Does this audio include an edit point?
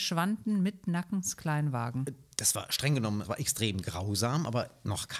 yes; 1 cut; at 3.2 s

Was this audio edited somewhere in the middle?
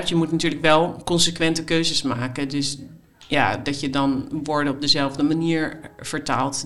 no; 0 cuts

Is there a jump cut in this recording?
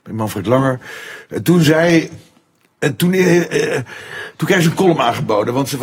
no; 0 cuts

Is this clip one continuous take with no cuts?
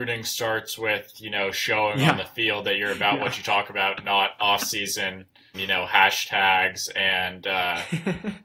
no; 1 cut; at 5.5 s

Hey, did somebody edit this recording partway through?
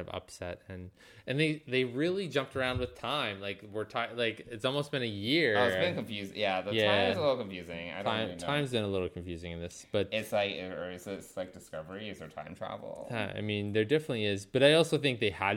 no; 0 cuts

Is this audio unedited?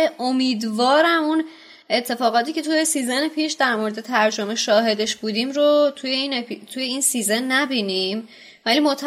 yes; 0 cuts

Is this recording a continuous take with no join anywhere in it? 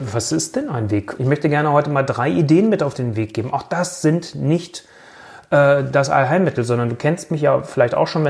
no; 1 cut; at 1.2 s

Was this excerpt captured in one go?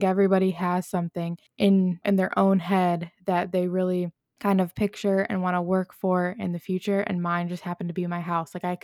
no; 1 cut; at 2.0 s

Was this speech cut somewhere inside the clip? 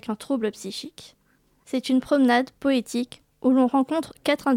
yes; 1 cut; at 1.6 s

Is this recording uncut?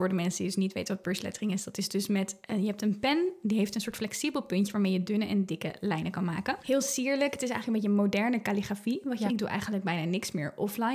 no; 2 cuts; at 6.6 s, 9.3 s

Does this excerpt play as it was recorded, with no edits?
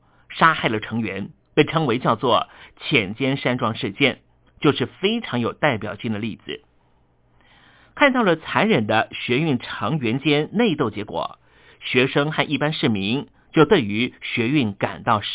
yes; 0 cuts

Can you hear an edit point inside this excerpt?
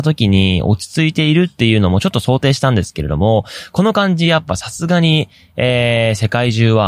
no; 0 cuts

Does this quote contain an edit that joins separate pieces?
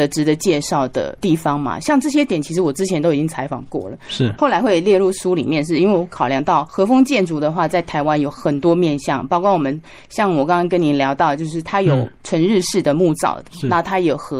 no; 0 cuts

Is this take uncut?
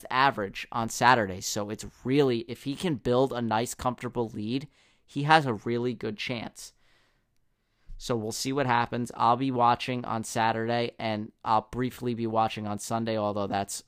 yes; 0 cuts

